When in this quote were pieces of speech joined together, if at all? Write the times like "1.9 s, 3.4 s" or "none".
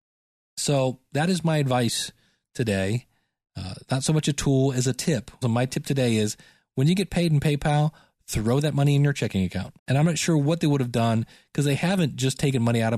5.4 s, 9.8 s